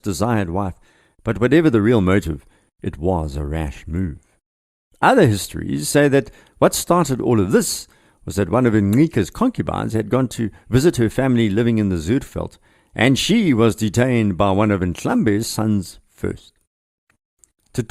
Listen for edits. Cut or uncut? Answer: uncut